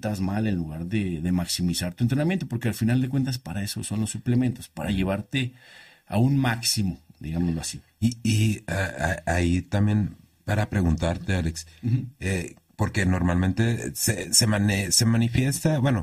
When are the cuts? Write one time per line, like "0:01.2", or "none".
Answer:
0:07.1